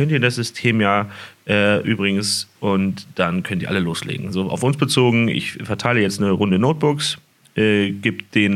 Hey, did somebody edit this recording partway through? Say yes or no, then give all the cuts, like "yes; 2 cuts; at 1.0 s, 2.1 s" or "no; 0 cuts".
no; 0 cuts